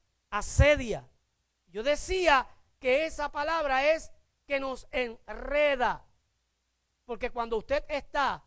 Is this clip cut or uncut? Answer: cut